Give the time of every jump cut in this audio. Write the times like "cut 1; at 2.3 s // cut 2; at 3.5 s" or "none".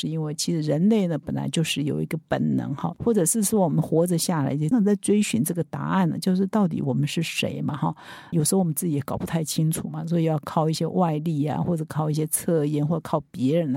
cut 1; at 4.7 s // cut 2; at 8.3 s